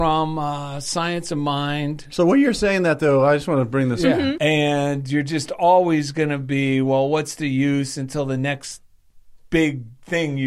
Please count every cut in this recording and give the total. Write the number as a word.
one